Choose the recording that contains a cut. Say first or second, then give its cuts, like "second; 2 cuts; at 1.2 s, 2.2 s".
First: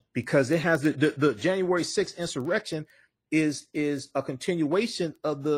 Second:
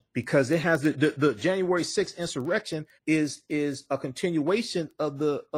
second; 1 cut; at 3.0 s